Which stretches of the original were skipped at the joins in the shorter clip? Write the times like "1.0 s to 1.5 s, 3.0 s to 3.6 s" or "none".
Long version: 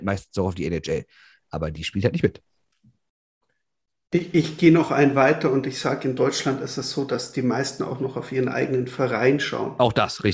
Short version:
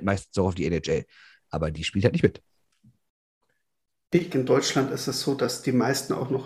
4.3 s to 6.0 s